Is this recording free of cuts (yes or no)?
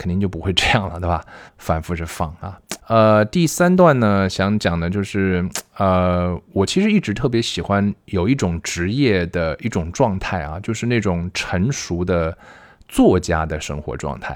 no